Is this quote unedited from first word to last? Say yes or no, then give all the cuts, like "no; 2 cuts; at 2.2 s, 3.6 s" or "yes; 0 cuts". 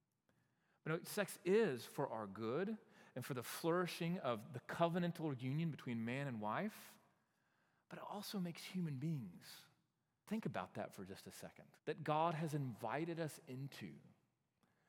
no; 2 cuts; at 10.2 s, 11.8 s